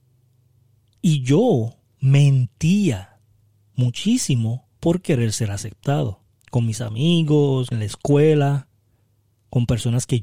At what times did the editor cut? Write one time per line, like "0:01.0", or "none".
0:04.7
0:06.3
0:07.7